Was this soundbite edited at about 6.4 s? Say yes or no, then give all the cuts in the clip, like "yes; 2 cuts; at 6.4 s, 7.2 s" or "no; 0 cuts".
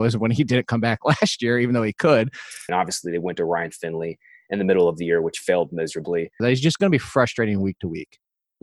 yes; 2 cuts; at 2.7 s, 6.4 s